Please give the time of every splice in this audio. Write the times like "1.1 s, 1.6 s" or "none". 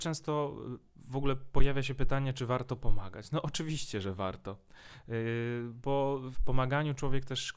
6.3 s